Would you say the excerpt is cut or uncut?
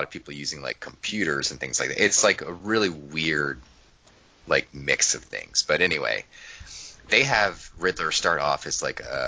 uncut